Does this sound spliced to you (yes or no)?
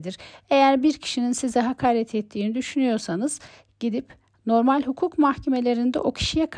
no